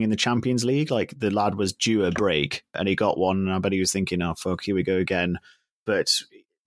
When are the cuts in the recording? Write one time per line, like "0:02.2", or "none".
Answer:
none

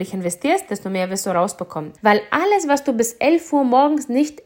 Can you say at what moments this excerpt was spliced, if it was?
0:02.0

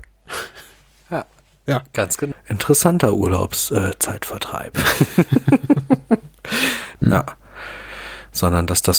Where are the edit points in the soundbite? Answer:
0:02.3
0:07.0

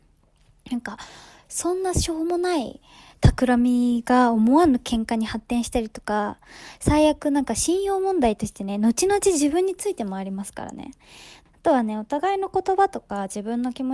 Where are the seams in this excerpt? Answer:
0:11.5

